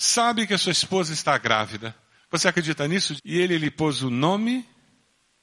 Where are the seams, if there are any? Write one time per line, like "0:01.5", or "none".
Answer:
0:02.2
0:03.2